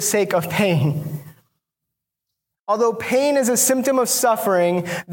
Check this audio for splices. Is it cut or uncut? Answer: uncut